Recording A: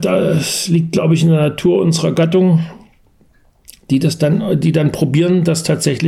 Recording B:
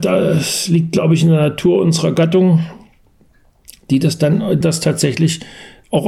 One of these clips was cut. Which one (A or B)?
B